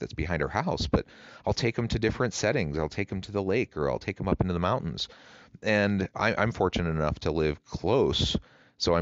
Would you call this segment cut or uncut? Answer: cut